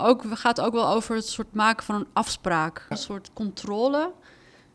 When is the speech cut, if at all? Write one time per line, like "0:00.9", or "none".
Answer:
0:02.9